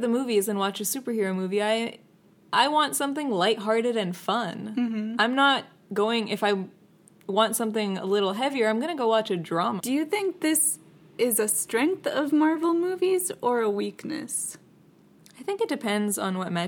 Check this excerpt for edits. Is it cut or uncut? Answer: cut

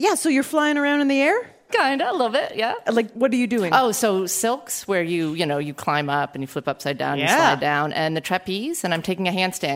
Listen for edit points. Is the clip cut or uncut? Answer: uncut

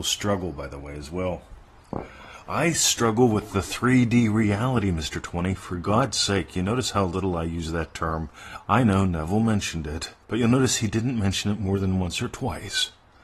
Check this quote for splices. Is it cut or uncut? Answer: cut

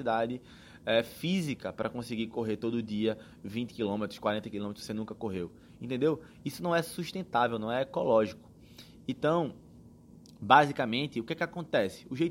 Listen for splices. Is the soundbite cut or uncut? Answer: uncut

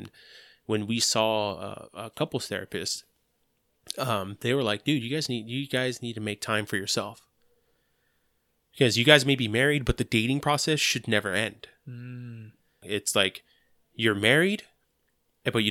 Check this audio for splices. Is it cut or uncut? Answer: cut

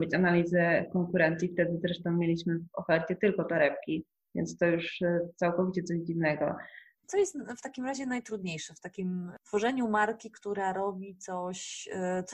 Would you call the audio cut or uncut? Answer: cut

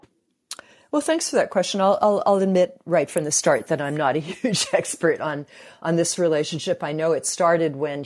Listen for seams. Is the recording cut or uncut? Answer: uncut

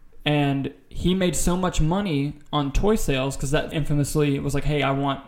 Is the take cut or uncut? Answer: cut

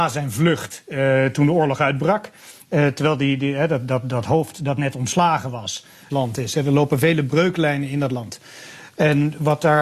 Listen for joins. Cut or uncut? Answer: cut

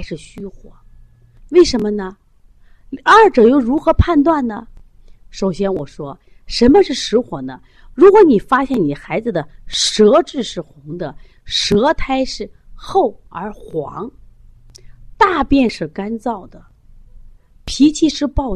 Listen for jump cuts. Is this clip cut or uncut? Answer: cut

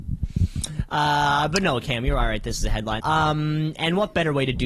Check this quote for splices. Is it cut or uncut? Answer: cut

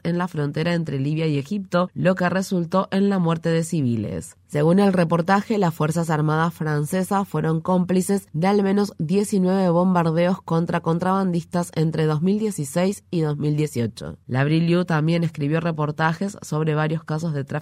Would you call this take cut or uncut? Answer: uncut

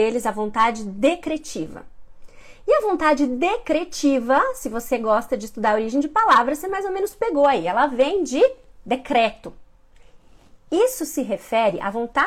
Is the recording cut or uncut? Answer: uncut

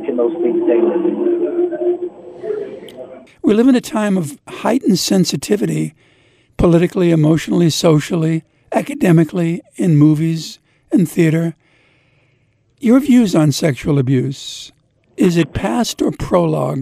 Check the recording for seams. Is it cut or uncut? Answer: cut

